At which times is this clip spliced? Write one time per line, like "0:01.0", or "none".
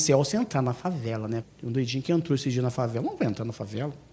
0:01.4

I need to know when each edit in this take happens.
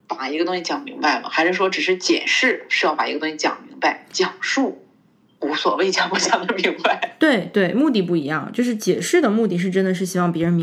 none

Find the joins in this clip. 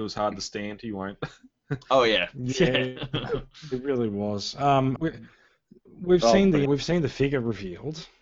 0:05.0
0:06.7

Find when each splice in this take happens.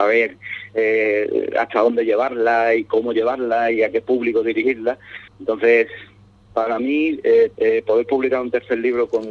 0:05.3
0:07.6

